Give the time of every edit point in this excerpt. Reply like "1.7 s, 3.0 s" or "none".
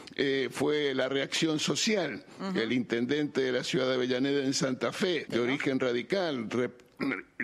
5.3 s